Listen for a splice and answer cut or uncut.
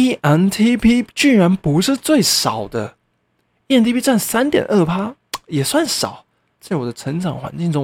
cut